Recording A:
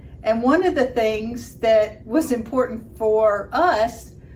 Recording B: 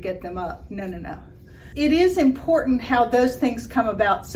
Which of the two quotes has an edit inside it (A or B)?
B